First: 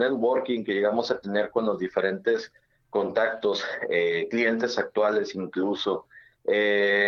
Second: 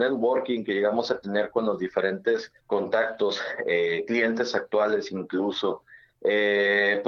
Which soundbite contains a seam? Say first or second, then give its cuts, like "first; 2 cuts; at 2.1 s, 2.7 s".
second; 1 cut; at 2.6 s